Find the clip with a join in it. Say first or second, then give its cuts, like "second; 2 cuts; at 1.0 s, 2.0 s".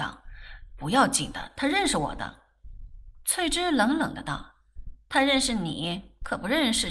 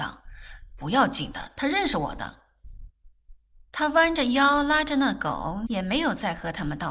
second; 2 cuts; at 2.9 s, 5.7 s